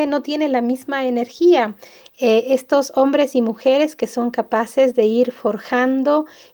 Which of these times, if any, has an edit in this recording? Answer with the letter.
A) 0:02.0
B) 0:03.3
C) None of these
A